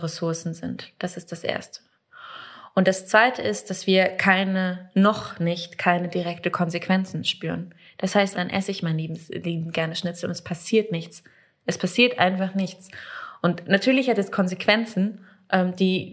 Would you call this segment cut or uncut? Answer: cut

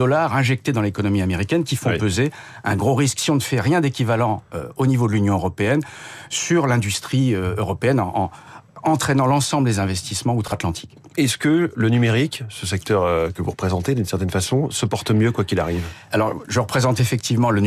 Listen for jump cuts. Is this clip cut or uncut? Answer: uncut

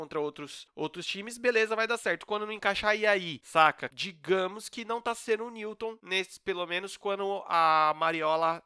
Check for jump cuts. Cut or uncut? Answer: cut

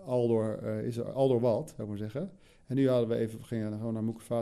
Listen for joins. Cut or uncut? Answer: uncut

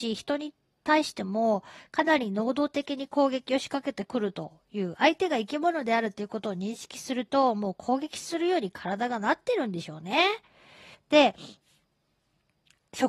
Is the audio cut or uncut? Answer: cut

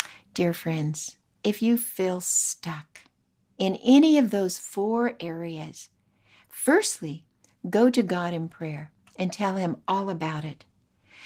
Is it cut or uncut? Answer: uncut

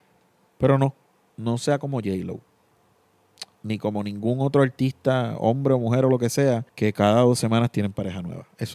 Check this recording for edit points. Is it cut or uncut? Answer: cut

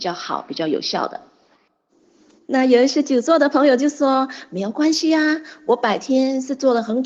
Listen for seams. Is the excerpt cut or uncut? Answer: uncut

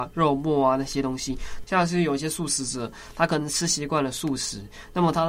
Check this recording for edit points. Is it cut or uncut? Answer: cut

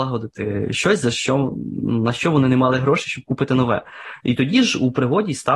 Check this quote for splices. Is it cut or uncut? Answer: cut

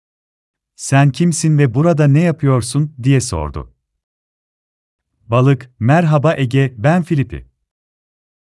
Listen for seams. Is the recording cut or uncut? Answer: uncut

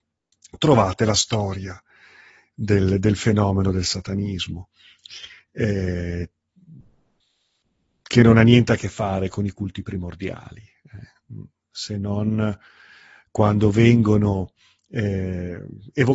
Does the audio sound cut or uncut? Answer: uncut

